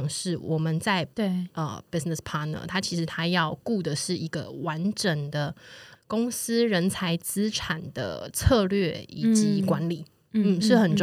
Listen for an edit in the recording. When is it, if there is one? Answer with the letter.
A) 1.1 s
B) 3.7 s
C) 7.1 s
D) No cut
A